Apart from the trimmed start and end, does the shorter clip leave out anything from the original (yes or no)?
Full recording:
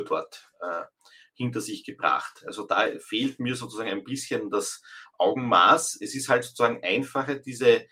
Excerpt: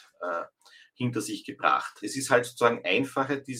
yes